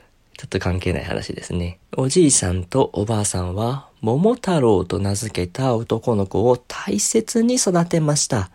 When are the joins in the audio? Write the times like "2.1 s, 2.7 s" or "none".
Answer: 1.9 s